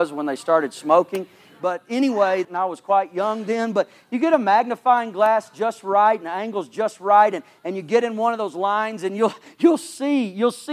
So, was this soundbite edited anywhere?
yes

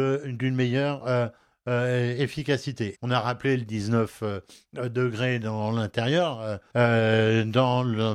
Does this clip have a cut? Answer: yes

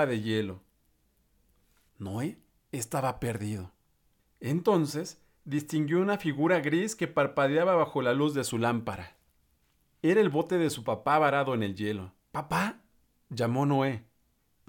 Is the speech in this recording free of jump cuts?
no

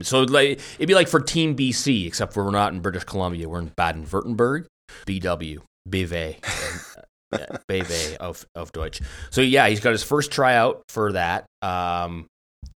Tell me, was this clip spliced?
yes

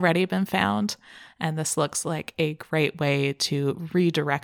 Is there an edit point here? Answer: yes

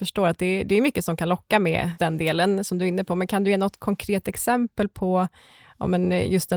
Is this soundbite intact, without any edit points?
no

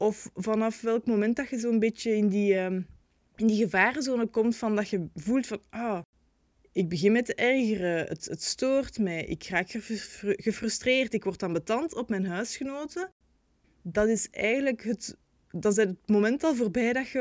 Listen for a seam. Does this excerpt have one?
no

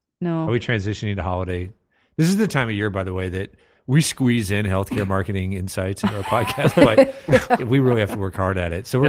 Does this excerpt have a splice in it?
no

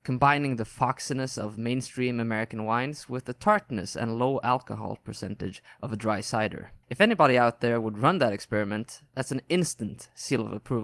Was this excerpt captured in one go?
no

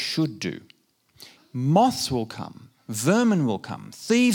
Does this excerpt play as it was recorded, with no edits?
no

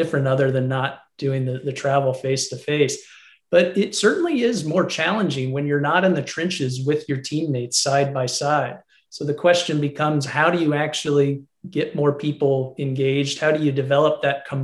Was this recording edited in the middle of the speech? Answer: no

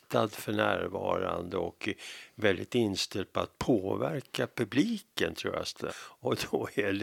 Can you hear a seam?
yes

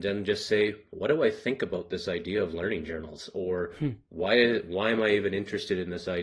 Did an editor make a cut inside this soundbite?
no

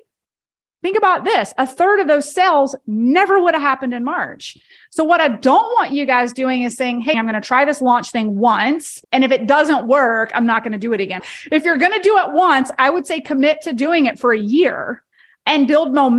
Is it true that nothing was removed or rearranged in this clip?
no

